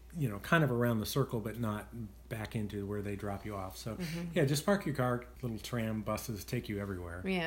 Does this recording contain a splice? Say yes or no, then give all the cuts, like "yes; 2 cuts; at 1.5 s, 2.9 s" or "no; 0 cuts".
yes; 1 cut; at 5.3 s